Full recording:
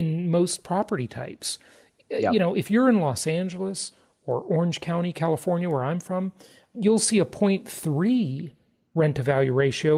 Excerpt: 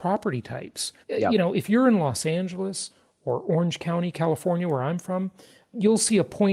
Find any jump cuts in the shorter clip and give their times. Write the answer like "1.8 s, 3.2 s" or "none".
1.0 s

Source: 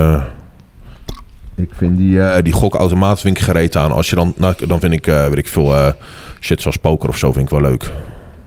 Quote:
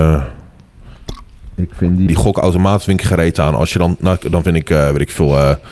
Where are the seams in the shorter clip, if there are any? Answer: 2.1 s

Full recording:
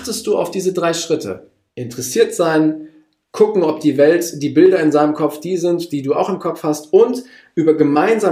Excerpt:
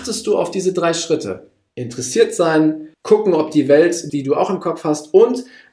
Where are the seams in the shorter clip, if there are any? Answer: 2.9 s, 4.1 s

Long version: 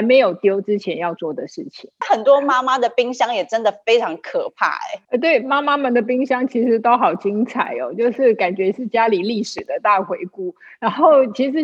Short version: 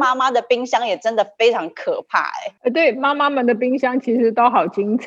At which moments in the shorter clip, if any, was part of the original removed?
none

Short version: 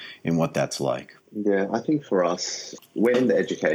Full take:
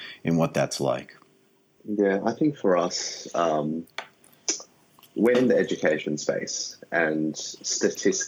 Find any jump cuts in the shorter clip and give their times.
1.2 s, 2.8 s

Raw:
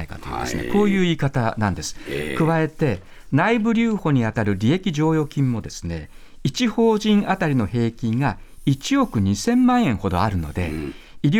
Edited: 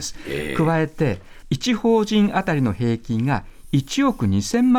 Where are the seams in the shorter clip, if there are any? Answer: 1.4 s

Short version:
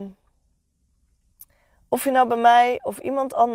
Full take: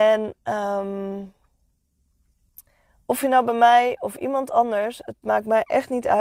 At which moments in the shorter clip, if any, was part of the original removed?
none

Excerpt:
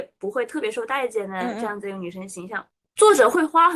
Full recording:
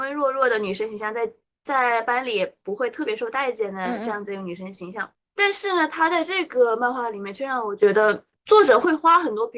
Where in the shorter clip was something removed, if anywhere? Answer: 2.8 s

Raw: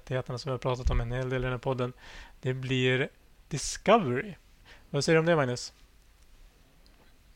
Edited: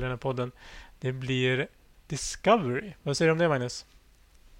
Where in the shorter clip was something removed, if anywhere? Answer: 3.0 s

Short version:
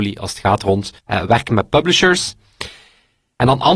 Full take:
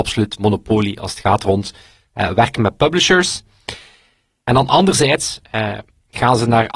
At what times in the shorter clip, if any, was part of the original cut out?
1.0 s

